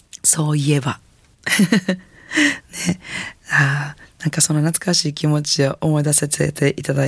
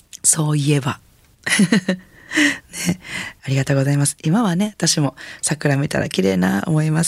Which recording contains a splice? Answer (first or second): second